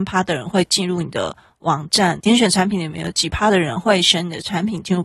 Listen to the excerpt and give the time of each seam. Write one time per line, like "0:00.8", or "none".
0:02.2